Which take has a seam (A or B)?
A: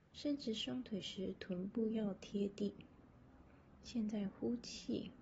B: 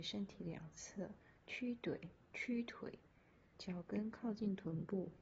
B